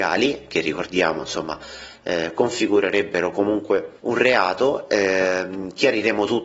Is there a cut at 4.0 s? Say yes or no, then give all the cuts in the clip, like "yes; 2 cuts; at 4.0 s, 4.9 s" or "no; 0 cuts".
yes; 1 cut; at 4.0 s